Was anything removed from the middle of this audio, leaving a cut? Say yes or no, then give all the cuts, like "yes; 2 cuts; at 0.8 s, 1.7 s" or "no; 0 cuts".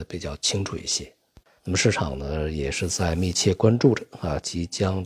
yes; 1 cut; at 1.6 s